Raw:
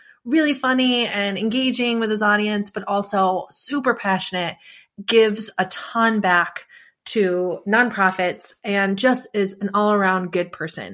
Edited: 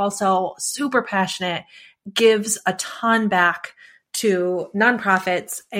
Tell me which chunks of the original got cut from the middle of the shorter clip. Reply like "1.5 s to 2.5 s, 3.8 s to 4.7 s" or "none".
none

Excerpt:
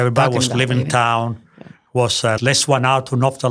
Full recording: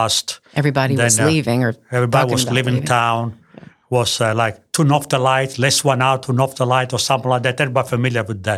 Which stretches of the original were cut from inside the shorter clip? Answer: 4.3 s to 5.5 s

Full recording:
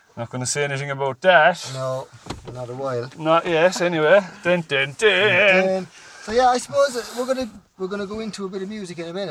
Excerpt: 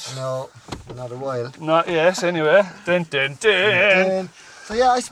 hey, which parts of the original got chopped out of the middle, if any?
none

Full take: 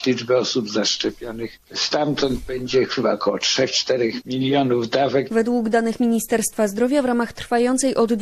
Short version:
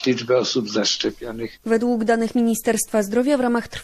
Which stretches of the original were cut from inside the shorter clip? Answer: 1.6 s to 5.3 s

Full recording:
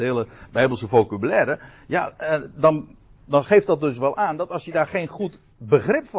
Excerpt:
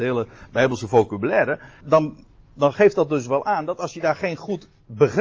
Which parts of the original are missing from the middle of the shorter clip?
1.8 s to 2.5 s

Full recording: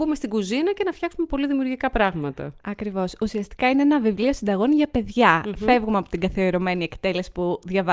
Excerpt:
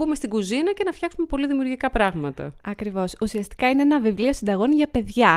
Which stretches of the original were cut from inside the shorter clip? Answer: none

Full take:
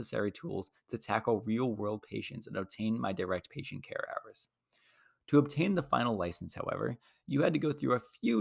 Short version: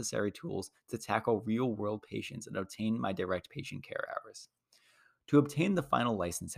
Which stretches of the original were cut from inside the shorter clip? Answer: none

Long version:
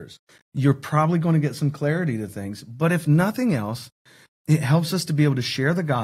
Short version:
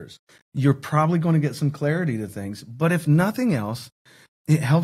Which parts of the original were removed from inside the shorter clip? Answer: none

